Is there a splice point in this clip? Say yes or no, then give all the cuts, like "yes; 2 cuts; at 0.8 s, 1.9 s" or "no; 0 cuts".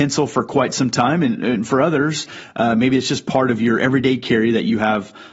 no; 0 cuts